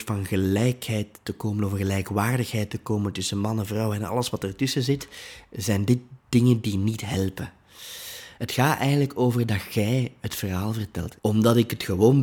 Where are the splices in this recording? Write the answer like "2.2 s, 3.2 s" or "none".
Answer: 8.4 s, 11.2 s